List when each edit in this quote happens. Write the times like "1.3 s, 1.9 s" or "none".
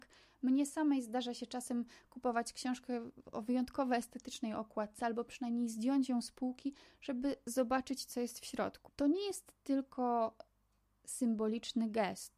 8.9 s